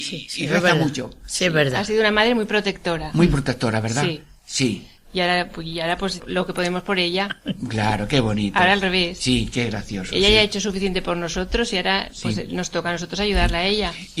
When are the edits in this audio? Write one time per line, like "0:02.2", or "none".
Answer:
0:06.2